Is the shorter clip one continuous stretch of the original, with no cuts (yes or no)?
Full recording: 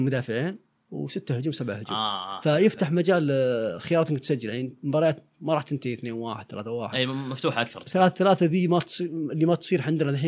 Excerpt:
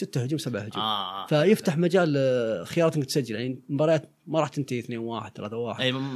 yes